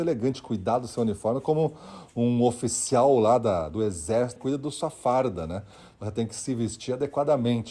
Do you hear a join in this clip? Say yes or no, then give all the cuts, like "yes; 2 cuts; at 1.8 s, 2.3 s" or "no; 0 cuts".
yes; 1 cut; at 4.4 s